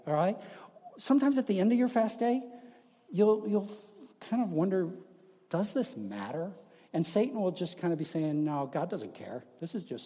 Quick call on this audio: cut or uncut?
uncut